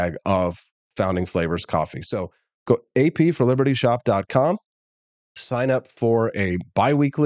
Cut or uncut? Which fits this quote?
uncut